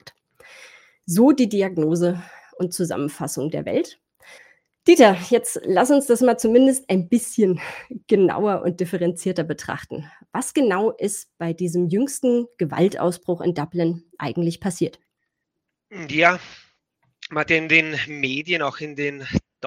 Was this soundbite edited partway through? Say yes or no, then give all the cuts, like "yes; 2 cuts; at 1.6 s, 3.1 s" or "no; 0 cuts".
no; 0 cuts